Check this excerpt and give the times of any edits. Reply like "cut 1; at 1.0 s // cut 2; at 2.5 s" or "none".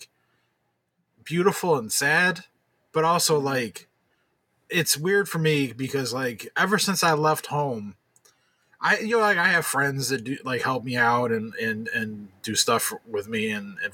none